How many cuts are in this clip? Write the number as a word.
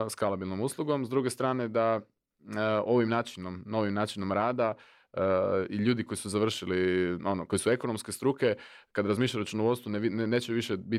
zero